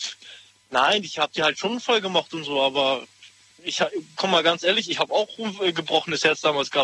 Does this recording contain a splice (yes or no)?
no